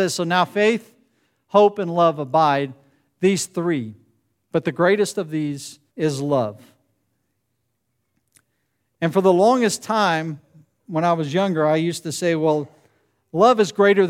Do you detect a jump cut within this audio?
yes; 1 cut; at 5.9 s

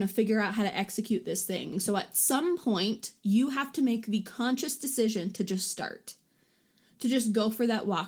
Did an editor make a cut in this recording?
yes; 1 cut; at 1.7 s

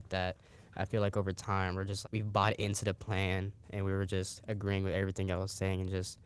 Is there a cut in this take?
yes; 1 cut; at 2.0 s

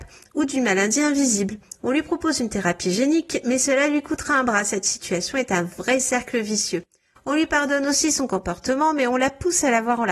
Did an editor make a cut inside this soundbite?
yes; 1 cut; at 1.8 s

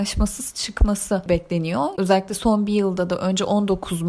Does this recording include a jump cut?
yes; 1 cut; at 1.9 s

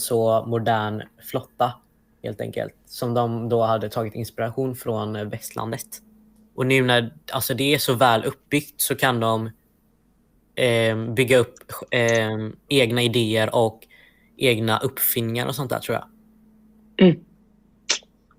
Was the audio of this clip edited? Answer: yes; 2 cuts; at 6.5 s, 12.7 s

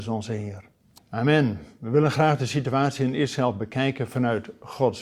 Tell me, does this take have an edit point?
yes; 1 cut; at 1.0 s

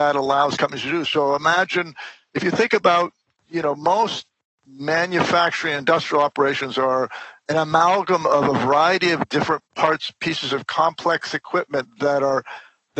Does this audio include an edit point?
yes; 3 cuts; at 1.0 s, 3.3 s, 9.7 s

